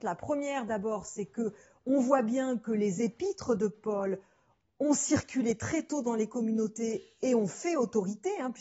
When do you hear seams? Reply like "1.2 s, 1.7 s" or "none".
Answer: none